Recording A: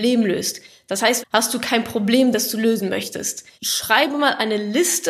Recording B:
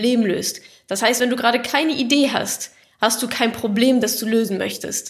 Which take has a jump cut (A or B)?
A